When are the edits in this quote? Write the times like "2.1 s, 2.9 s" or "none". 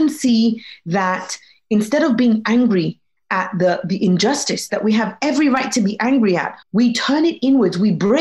6.6 s